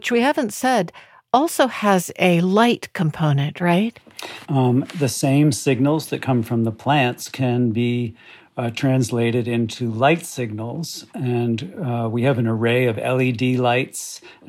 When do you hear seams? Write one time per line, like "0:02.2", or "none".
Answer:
0:04.4